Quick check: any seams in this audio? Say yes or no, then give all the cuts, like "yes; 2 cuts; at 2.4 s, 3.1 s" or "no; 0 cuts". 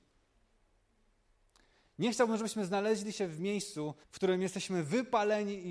yes; 1 cut; at 4.0 s